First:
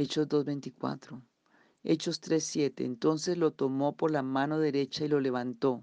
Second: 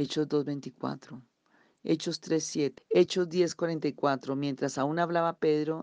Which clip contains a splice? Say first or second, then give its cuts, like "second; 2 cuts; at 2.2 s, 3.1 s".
second; 1 cut; at 2.8 s